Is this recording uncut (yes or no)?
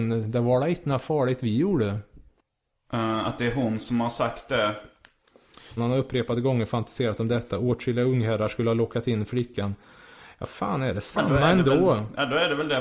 no